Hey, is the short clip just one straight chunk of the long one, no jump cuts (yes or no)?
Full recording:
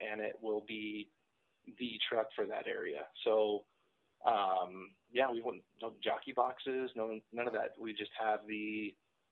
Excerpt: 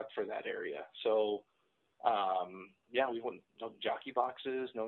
yes